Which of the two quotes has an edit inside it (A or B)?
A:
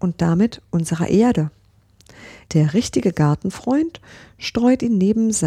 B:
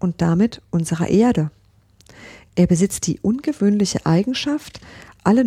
A